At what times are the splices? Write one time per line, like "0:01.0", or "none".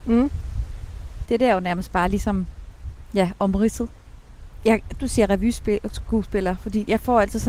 0:01.2
0:05.0